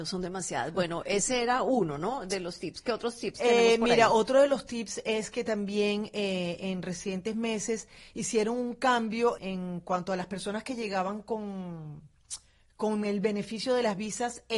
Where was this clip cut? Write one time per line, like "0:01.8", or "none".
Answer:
0:09.4